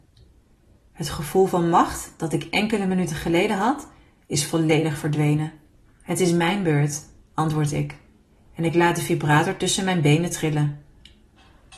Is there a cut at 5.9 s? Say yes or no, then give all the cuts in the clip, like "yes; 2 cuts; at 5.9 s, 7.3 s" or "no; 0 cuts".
yes; 1 cut; at 5.9 s